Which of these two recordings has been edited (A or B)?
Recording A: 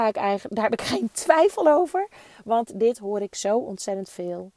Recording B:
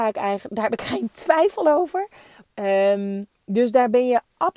B